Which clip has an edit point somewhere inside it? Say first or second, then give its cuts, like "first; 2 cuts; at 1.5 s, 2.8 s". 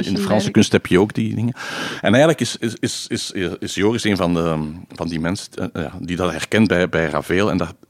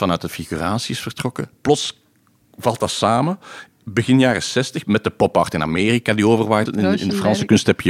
second; 2 cuts; at 4.8 s, 6.7 s